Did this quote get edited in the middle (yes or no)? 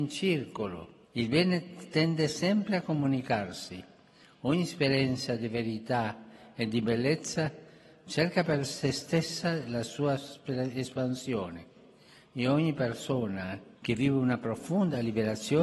yes